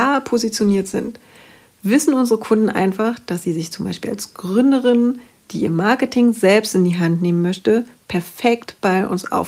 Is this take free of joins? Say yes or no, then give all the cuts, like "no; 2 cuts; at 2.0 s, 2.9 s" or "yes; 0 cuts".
yes; 0 cuts